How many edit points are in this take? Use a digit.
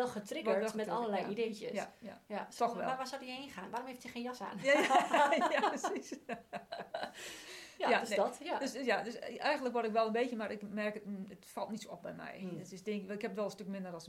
0